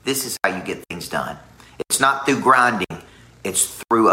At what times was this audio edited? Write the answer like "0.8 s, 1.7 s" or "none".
none

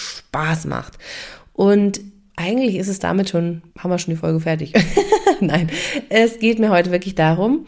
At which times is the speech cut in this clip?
3.7 s

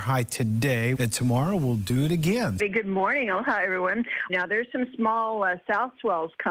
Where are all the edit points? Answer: 0.9 s, 2.6 s, 4.3 s

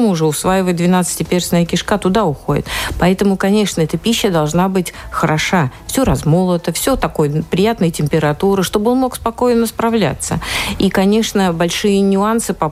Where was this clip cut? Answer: none

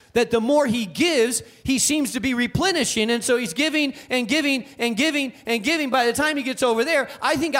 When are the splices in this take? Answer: none

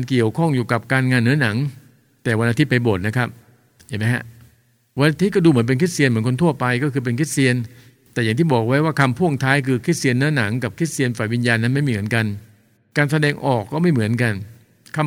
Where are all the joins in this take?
none

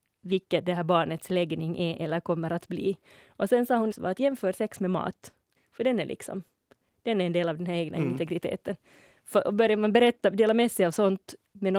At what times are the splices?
3.9 s, 5.6 s

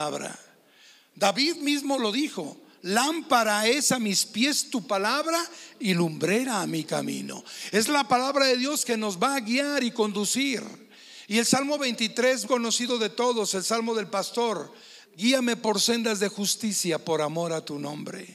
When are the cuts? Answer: 12.4 s, 15.0 s

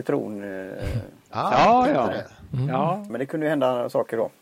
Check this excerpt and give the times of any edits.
3.1 s

